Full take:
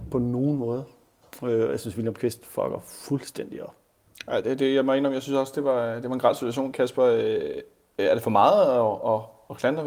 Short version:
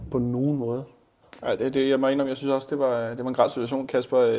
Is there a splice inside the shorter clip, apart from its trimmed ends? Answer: yes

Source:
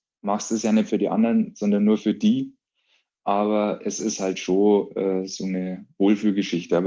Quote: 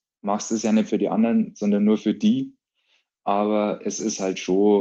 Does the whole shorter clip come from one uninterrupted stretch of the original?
yes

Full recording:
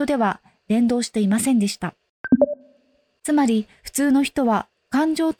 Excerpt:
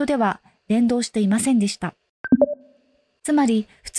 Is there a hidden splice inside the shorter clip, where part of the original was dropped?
no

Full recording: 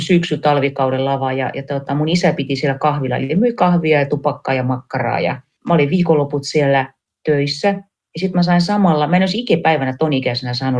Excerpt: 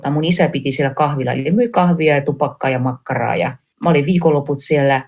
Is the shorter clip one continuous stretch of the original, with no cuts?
yes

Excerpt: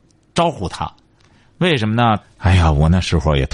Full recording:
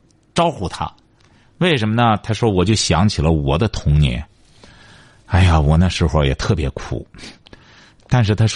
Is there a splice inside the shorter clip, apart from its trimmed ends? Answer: yes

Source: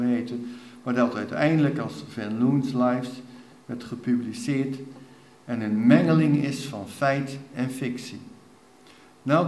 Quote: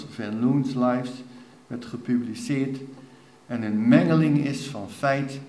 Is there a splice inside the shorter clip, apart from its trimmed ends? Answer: no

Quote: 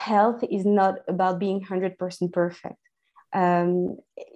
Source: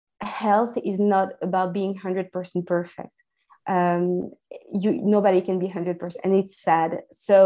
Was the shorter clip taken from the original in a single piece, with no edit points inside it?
yes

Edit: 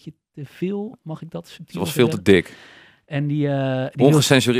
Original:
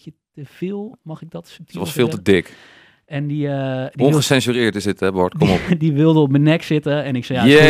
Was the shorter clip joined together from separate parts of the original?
no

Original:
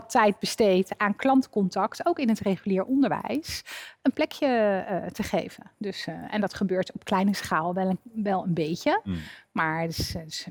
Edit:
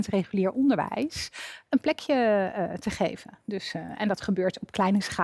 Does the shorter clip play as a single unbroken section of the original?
yes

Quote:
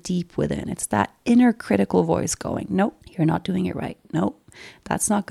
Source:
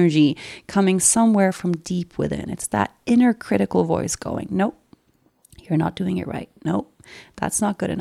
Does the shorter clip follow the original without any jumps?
no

